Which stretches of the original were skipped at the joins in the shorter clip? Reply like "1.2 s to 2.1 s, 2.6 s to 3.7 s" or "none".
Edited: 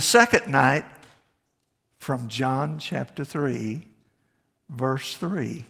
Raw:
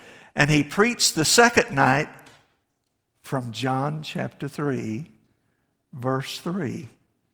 none